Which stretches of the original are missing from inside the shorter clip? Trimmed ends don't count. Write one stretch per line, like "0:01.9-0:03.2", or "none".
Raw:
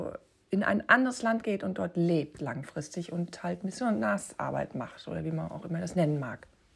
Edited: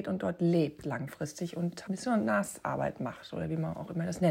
0:03.4-0:03.6